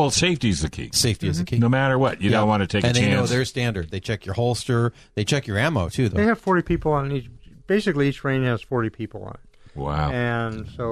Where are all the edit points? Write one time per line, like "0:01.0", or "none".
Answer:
0:03.9
0:06.1